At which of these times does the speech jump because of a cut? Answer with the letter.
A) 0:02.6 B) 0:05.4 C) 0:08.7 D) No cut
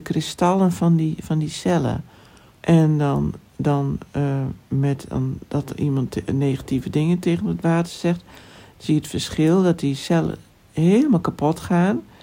A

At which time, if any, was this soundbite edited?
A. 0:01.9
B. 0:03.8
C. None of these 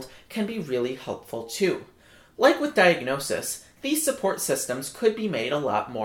C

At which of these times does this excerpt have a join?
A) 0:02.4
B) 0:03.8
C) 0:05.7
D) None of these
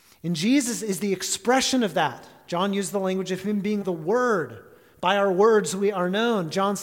B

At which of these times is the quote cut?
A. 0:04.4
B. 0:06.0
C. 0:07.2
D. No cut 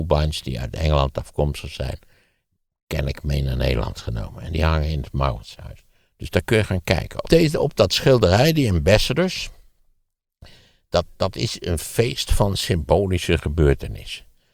C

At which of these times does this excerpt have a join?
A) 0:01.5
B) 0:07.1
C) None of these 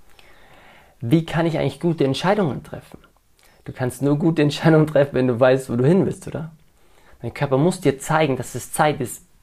B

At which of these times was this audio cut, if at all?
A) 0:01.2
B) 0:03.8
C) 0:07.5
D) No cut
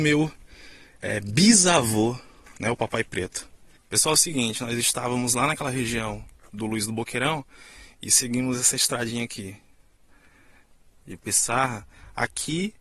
B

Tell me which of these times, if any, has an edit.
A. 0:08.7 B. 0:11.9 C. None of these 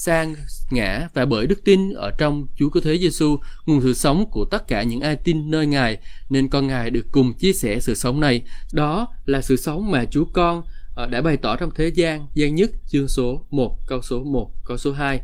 A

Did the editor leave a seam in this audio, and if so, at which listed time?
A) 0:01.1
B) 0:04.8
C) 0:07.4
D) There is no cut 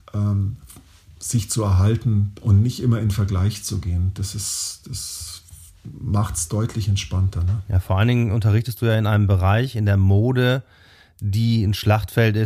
D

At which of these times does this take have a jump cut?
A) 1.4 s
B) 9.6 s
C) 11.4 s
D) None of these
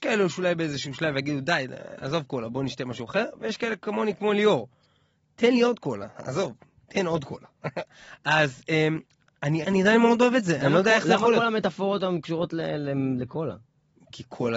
B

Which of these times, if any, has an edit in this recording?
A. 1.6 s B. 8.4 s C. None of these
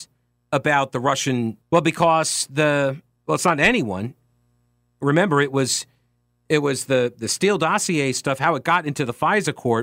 A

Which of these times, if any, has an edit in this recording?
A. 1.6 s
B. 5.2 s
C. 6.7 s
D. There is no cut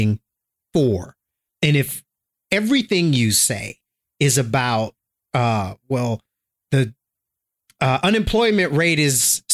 C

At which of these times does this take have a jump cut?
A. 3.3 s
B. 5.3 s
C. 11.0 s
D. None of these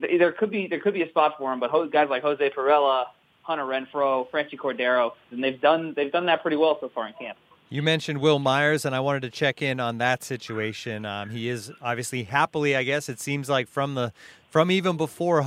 B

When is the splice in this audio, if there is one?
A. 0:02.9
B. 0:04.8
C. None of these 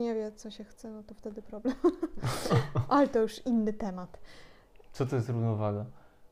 B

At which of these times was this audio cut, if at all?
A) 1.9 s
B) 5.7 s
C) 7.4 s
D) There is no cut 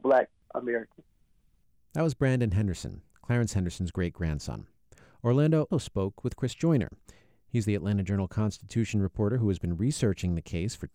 B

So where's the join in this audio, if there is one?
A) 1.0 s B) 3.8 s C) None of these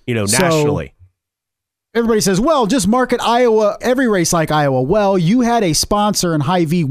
B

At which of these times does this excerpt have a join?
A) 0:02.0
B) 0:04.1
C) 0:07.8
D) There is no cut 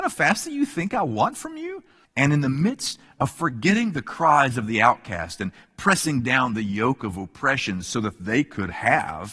A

